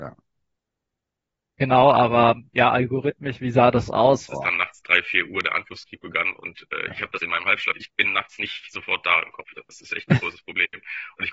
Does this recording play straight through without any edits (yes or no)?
no